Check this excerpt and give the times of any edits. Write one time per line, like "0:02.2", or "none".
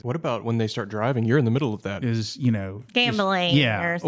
0:02.0